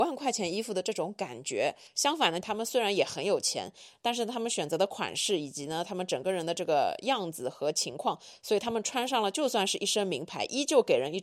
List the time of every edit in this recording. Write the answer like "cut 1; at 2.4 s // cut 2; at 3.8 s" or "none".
cut 1; at 2.4 s